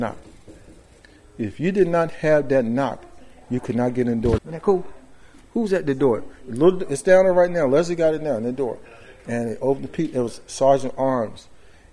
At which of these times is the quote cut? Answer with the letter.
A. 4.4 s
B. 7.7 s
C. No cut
A